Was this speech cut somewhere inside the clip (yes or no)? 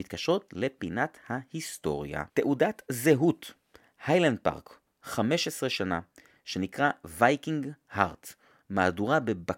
yes